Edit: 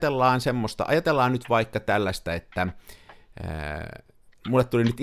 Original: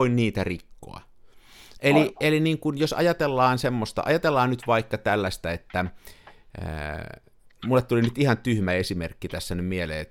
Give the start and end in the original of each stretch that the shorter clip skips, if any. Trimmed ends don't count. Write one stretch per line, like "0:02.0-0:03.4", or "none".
none